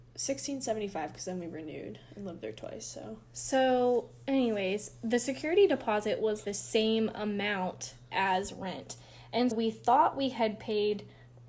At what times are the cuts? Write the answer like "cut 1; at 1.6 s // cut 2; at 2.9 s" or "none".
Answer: cut 1; at 6.4 s // cut 2; at 9.5 s